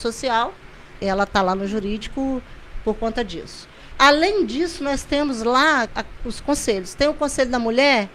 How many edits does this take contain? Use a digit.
3